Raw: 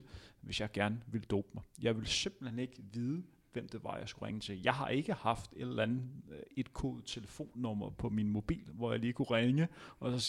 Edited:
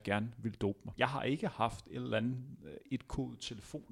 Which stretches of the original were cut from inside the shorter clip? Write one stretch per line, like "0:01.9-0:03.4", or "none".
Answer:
0:01.7-0:04.6